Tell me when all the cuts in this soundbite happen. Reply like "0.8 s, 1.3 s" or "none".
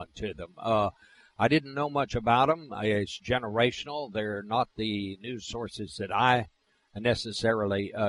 none